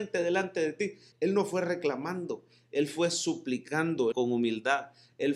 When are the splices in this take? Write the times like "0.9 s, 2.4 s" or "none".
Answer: 1.1 s, 4.1 s

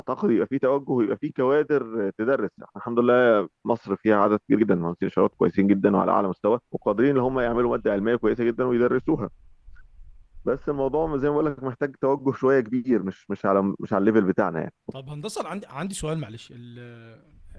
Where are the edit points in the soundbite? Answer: 6.7 s, 14.8 s

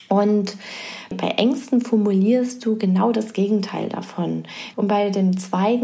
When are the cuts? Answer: 1.1 s, 4.7 s

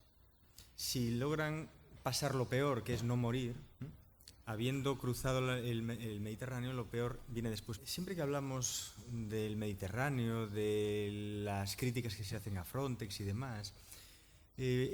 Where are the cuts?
3.7 s, 7.8 s

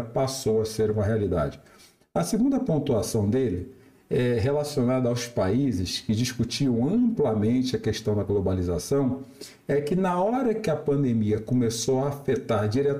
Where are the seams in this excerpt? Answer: none

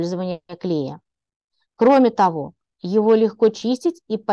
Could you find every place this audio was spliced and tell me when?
2.8 s

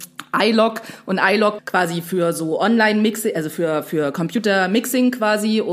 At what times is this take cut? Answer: 1.6 s

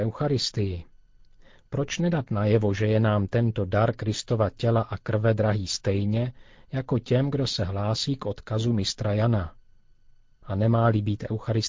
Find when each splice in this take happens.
none

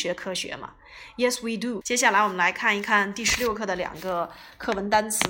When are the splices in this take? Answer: 1.8 s

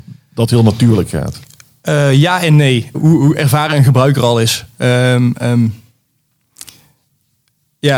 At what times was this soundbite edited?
2.9 s

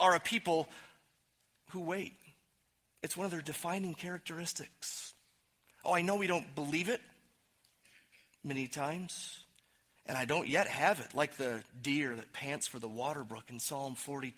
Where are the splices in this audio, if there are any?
10.0 s

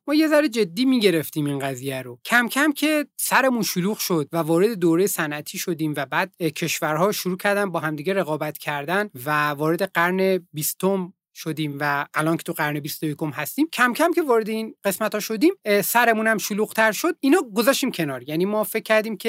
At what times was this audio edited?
none

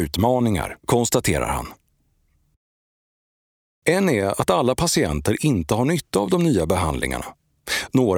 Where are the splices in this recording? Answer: 3.8 s

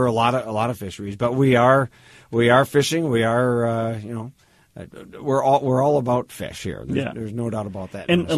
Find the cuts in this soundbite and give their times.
none

